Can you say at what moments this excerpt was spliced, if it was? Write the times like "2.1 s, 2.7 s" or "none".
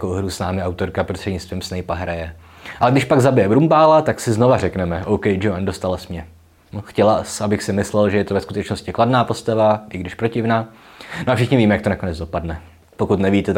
2.8 s